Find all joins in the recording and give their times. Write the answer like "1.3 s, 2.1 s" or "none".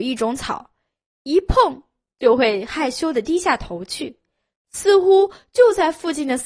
none